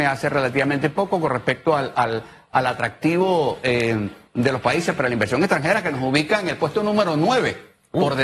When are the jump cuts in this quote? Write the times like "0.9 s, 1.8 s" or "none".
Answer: none